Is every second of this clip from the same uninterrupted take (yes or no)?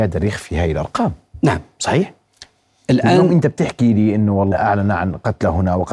no